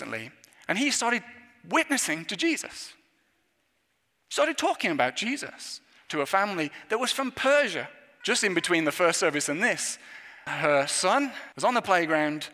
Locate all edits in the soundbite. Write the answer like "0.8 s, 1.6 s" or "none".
8.2 s, 10.5 s, 11.5 s